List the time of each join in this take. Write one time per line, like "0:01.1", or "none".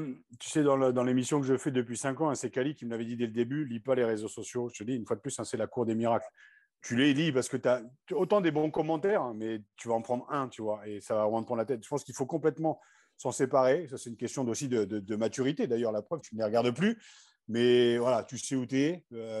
0:16.2